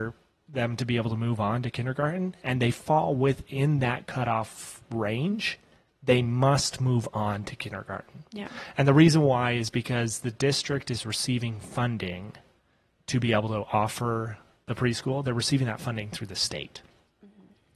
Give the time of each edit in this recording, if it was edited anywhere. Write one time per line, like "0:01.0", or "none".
none